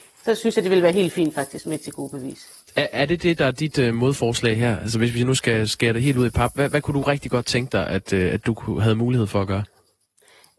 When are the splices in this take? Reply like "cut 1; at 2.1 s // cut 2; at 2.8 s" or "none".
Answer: none